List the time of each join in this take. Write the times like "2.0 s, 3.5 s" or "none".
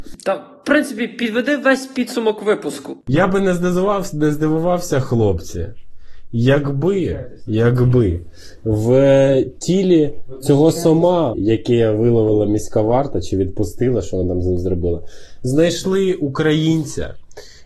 11.3 s